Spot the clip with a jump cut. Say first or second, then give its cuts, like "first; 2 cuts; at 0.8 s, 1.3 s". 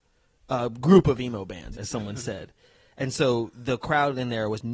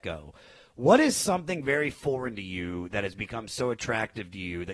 first; 1 cut; at 1.7 s